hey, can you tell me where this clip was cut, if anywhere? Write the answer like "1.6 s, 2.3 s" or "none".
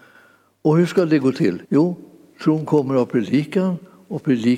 1.7 s